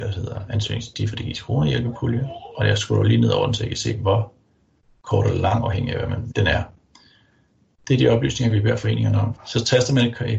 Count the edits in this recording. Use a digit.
2